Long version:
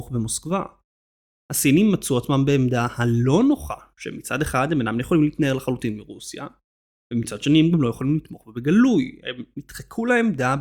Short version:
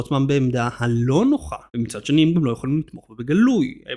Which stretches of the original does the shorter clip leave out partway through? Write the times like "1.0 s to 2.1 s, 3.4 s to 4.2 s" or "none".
3.8 s to 7.0 s

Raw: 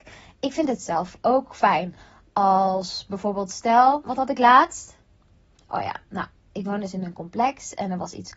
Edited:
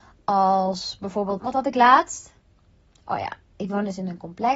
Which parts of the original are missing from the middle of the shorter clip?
3.5 s to 4.0 s, 6.1 s to 6.4 s

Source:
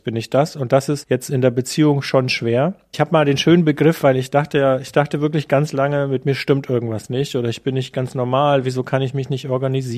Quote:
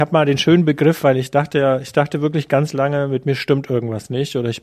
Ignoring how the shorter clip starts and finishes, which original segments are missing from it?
none

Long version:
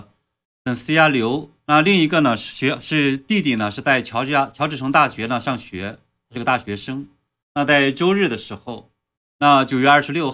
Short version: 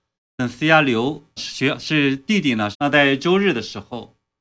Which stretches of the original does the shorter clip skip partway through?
1.6 s to 2.4 s, 3.7 s to 7.5 s

